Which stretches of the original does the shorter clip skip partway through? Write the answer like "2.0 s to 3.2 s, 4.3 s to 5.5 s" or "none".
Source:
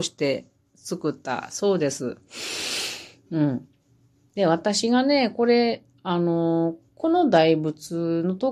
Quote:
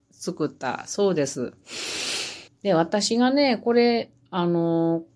3.1 s to 4.2 s